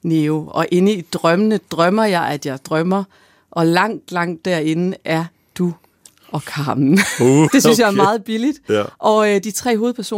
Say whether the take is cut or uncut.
cut